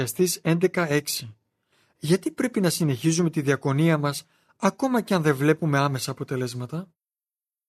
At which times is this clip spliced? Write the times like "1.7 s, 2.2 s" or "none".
none